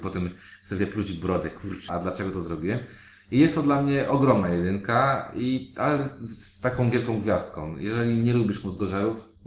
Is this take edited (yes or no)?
yes